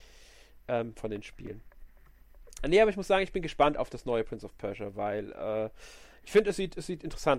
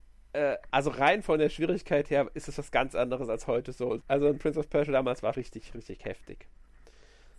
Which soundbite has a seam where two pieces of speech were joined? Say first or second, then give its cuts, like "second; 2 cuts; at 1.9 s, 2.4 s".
second; 2 cuts; at 4.0 s, 5.3 s